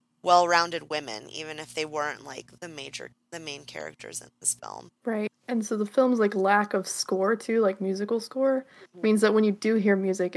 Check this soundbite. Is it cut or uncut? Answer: cut